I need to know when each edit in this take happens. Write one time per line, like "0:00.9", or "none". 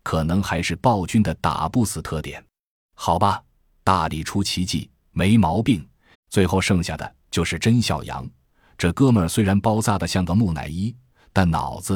0:06.1